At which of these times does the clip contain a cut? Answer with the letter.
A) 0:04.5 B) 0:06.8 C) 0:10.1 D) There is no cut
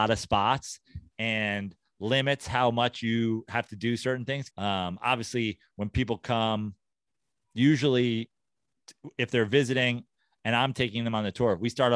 A